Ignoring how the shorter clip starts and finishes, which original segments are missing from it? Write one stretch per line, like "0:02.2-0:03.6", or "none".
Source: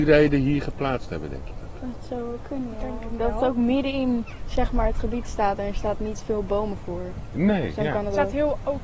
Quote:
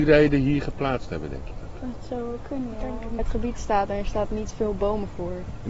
0:03.2-0:04.9